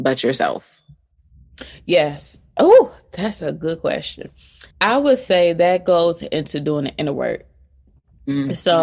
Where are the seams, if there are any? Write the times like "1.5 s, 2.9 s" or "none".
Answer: 4.7 s